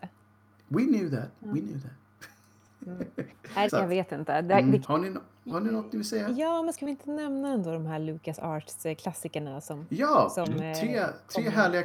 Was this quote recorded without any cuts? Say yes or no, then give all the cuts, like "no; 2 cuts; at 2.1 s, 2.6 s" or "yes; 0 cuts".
no; 2 cuts; at 3.7 s, 4.8 s